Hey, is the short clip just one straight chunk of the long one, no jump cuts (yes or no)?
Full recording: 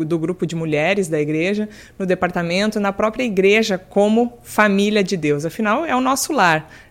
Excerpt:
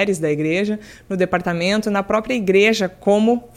yes